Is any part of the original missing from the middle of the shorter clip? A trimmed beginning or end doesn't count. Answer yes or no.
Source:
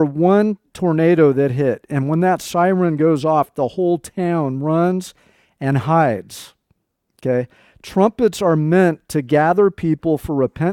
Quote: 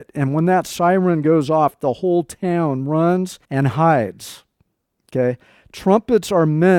yes